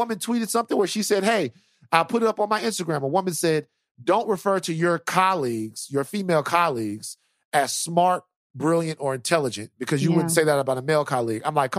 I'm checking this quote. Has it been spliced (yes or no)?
no